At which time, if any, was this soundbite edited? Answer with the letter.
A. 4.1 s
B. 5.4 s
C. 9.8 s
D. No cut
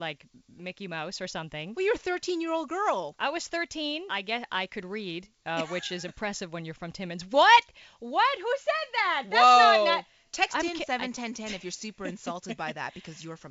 A